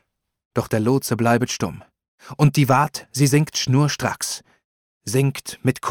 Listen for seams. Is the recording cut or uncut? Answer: uncut